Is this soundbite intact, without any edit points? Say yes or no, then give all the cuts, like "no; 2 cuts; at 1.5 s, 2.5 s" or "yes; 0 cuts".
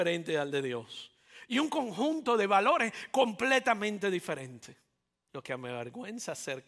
no; 1 cut; at 5.3 s